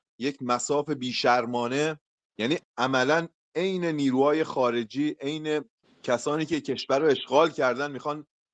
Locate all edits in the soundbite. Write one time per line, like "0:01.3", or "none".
0:02.6